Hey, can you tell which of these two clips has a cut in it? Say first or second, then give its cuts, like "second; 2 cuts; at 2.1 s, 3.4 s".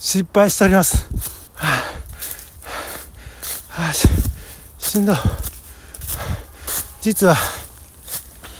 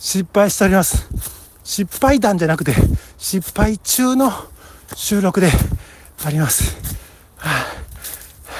first; 1 cut; at 1.5 s